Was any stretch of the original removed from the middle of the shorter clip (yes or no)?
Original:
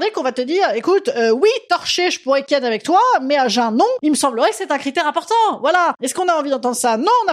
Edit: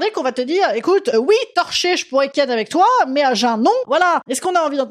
yes